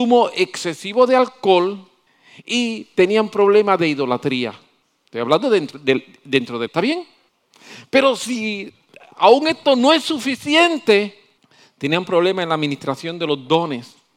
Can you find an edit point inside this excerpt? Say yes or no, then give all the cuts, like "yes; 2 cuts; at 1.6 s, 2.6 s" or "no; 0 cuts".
yes; 1 cut; at 6.7 s